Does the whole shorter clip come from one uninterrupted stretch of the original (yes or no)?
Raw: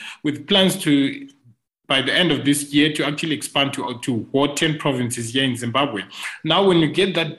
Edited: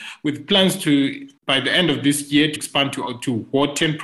no